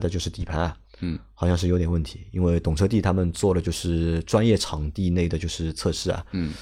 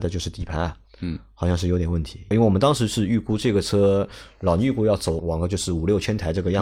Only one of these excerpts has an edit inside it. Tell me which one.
second; 2 cuts; at 2.3 s, 5.2 s

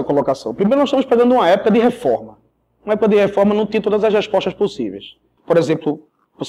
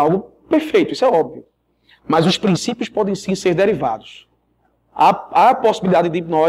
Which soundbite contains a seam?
first; 1 cut; at 5.4 s

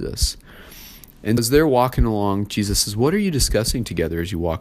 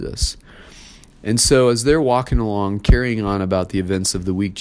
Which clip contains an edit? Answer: first; 2 cuts; at 1.4 s, 2.5 s

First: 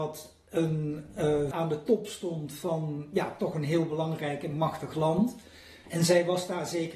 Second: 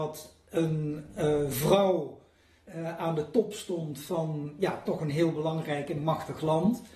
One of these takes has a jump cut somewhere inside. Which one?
first; 2 cuts; at 1.5 s, 5.8 s

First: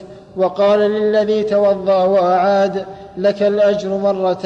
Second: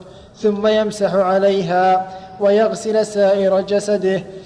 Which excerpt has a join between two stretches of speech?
second; 1 cut; at 2.4 s

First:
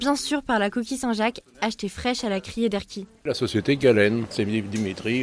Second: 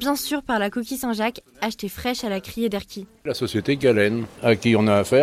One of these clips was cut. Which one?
first; 1 cut; at 4.3 s

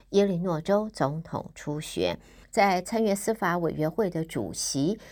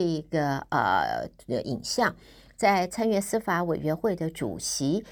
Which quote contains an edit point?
first; 1 cut; at 2.4 s

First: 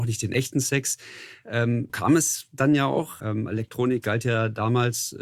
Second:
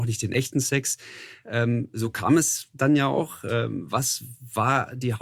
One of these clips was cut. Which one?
first; 2 cuts; at 1.9 s, 3.2 s

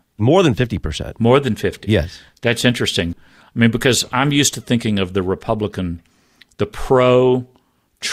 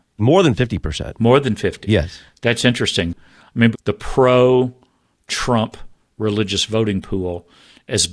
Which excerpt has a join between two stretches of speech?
second; 1 cut; at 3.7 s

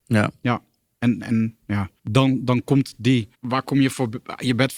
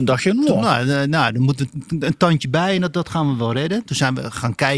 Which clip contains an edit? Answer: first; 2 cuts; at 2.0 s, 3.3 s

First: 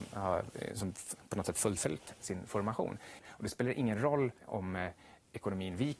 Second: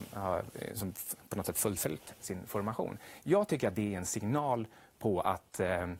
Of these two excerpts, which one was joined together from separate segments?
first; 2 cuts; at 3.2 s, 4.4 s

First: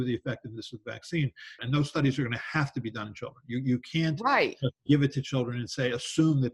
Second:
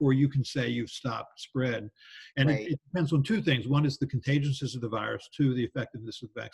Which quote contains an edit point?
first; 1 cut; at 1.6 s

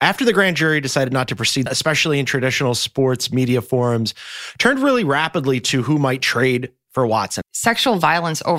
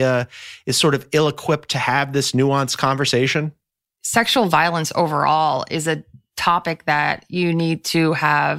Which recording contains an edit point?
first; 2 cuts; at 1.7 s, 7.4 s

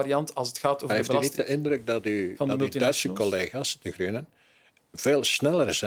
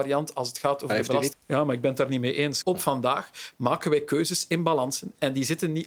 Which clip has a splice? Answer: second; 2 cuts; at 1.3 s, 2.6 s

